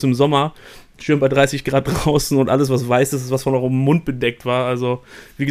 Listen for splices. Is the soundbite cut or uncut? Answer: uncut